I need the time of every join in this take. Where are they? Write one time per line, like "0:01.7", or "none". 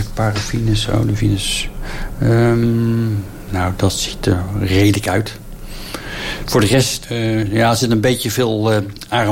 0:07.0